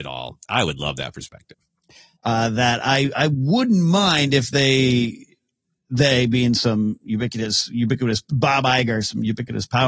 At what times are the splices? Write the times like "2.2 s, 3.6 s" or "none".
2.2 s